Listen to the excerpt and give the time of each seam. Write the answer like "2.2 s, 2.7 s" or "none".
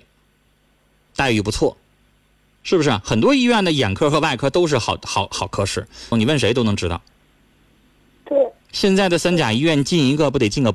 6.1 s, 8.6 s